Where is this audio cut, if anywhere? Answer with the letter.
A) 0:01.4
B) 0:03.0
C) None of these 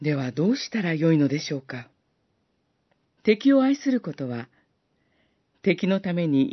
B